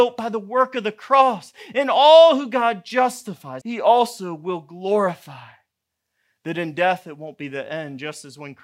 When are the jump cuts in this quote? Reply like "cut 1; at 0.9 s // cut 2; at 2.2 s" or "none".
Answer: cut 1; at 3.6 s